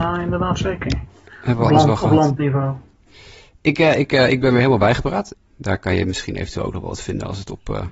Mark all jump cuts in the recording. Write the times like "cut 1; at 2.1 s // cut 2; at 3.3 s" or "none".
cut 1; at 4.0 s // cut 2; at 5.3 s